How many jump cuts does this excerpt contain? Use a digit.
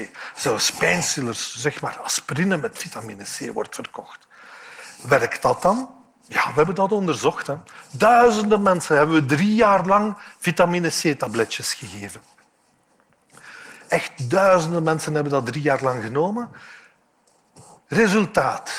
0